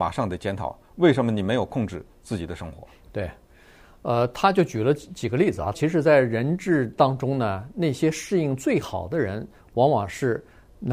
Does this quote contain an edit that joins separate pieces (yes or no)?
yes